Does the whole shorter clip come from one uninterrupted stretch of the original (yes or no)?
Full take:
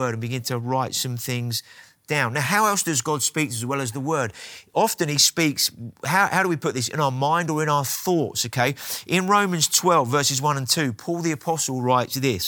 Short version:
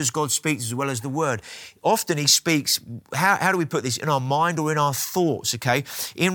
yes